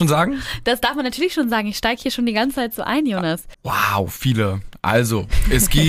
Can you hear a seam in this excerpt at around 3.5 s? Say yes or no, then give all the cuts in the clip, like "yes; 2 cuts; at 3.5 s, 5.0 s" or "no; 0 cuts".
yes; 1 cut; at 3.5 s